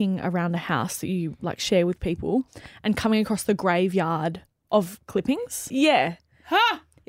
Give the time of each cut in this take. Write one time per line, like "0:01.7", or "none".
0:05.7

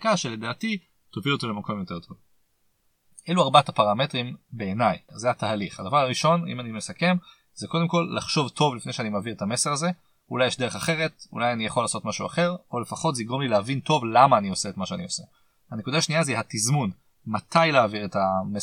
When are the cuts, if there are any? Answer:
0:15.6

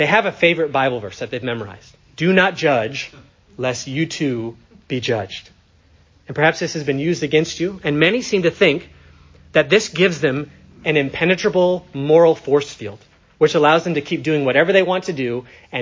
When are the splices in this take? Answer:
0:02.1

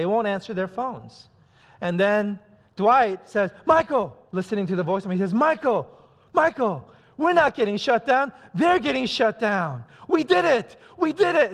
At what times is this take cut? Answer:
0:01.6

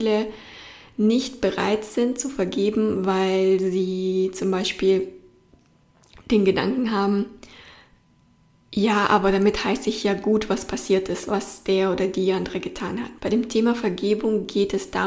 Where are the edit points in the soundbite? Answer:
0:13.2

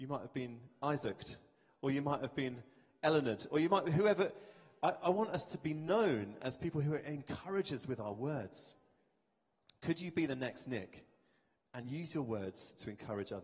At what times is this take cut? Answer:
none

